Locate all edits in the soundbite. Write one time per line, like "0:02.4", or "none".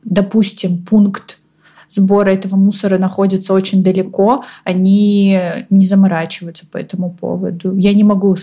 none